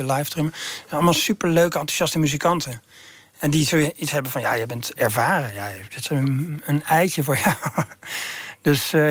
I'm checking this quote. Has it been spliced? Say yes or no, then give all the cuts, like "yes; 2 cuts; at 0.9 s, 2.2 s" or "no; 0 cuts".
no; 0 cuts